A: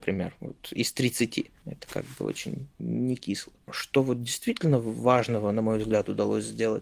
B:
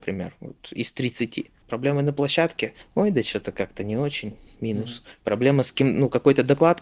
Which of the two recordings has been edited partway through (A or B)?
B